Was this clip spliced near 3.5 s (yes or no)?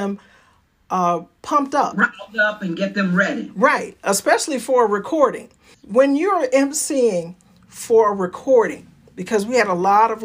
no